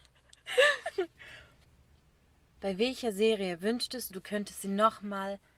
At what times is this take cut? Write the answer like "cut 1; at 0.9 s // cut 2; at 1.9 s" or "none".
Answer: cut 1; at 4.1 s